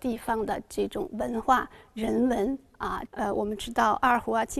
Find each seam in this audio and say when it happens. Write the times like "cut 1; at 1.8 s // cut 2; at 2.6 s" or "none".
cut 1; at 3.1 s